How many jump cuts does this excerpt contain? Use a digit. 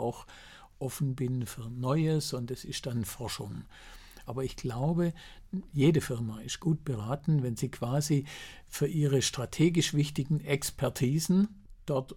1